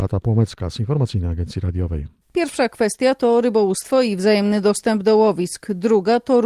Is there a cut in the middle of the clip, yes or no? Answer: yes